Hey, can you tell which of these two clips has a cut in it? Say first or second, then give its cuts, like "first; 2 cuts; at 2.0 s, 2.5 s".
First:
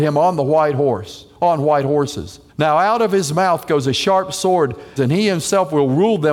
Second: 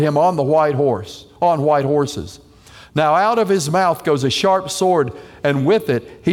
first; 2 cuts; at 2.5 s, 5.0 s